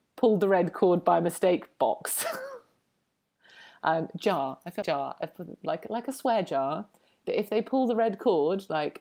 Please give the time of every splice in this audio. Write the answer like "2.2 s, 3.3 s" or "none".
4.8 s